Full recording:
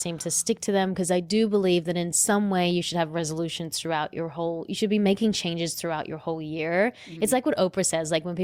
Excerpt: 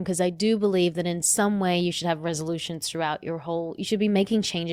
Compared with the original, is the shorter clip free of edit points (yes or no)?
yes